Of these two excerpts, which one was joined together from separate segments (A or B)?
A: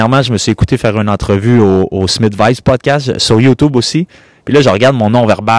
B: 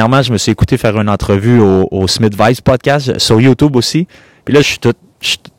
B